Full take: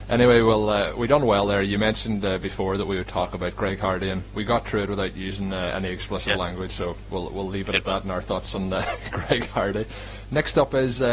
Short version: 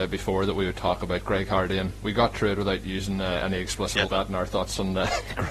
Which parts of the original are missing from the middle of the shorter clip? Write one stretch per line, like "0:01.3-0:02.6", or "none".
0:06.4-0:07.8